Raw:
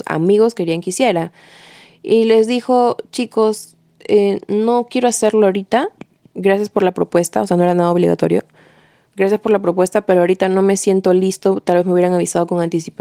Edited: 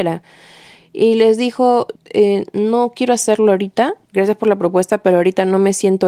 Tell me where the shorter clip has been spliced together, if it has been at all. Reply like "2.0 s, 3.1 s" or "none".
2.0 s, 4.0 s